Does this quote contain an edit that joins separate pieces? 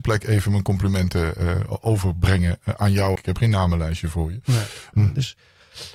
yes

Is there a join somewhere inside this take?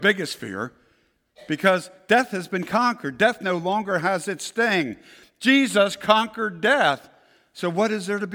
no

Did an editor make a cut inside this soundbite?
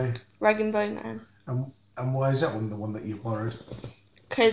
no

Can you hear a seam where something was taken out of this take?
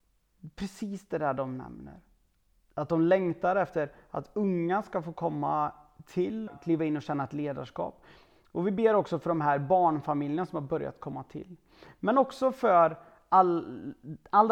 yes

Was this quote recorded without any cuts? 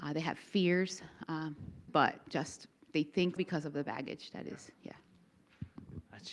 no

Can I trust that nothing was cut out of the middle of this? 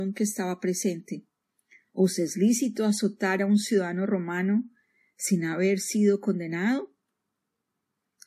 yes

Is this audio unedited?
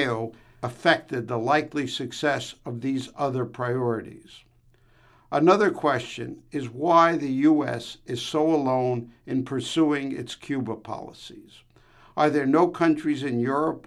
yes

